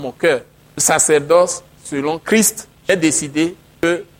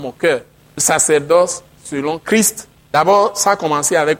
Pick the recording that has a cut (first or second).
first